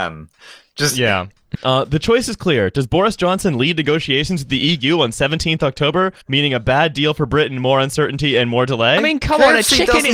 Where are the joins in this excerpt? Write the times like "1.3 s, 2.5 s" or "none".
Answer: 1.5 s, 6.2 s